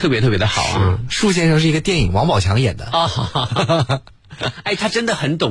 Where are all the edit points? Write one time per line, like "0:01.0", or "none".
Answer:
none